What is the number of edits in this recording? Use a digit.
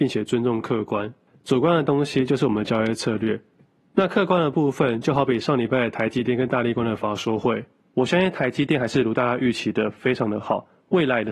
0